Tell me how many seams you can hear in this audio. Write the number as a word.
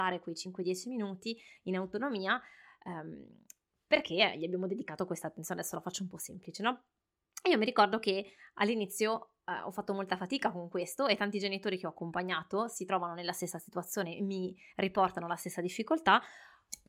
zero